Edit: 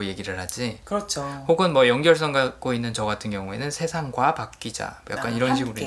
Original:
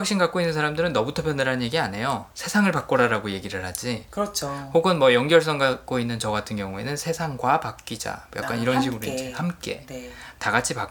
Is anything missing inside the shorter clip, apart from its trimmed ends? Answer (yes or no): no